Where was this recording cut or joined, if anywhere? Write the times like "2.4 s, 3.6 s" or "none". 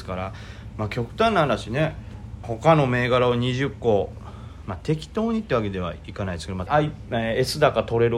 2.4 s, 6.7 s